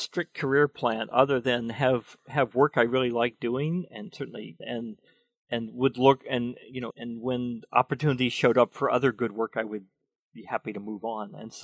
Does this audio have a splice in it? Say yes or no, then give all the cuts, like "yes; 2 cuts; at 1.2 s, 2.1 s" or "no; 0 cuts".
yes; 2 cuts; at 4.6 s, 6.9 s